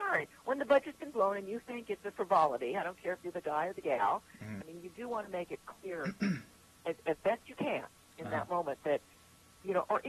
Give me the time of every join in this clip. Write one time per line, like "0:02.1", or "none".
0:04.6